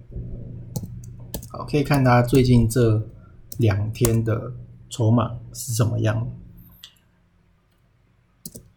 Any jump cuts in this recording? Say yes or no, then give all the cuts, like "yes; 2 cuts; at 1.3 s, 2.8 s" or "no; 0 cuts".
no; 0 cuts